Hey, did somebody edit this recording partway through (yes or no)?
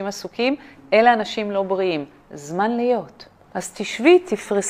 no